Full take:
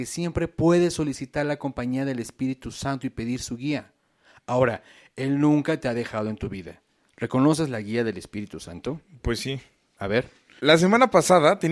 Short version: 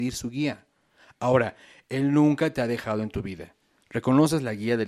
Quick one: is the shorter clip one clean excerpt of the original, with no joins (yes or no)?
yes